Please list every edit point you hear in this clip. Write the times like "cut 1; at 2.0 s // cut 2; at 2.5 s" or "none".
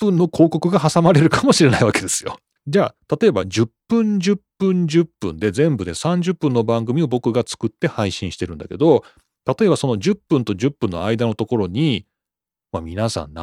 cut 1; at 2.6 s